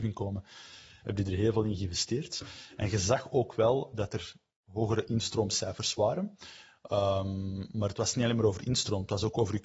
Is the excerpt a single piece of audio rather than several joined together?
no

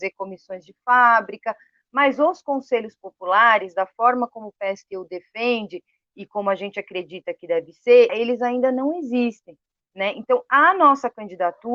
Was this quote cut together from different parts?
yes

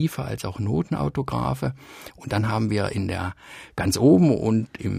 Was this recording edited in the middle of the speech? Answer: no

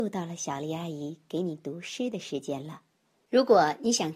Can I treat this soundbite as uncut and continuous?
no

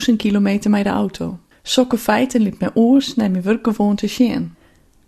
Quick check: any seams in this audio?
yes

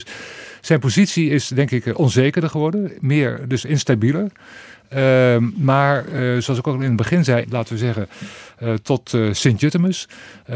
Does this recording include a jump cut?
yes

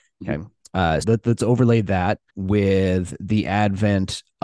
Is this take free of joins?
no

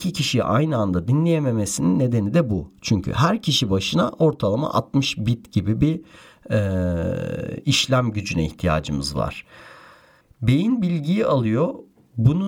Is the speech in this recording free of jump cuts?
no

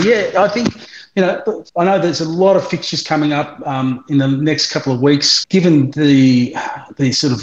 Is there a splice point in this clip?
yes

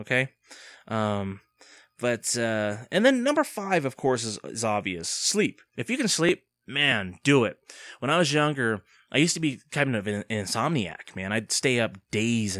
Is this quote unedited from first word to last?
no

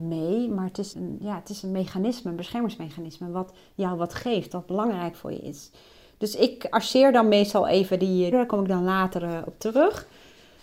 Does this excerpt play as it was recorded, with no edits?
no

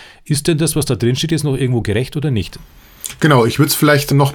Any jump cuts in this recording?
no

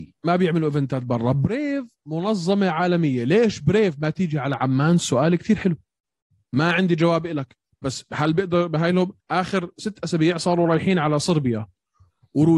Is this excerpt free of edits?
no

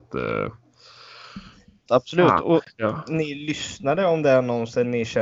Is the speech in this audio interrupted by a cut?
yes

